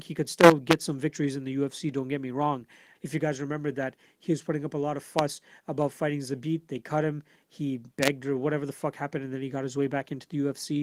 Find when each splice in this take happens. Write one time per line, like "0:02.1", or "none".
0:02.9